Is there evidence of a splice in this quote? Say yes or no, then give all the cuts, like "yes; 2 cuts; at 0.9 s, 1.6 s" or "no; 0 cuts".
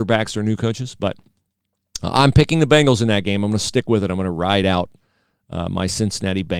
no; 0 cuts